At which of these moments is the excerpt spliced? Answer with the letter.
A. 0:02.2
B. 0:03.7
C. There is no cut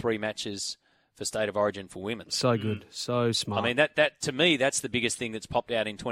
C